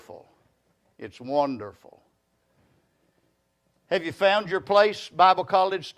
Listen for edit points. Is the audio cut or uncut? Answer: uncut